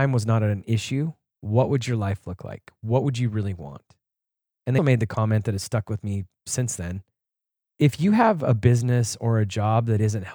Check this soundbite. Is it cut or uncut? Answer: cut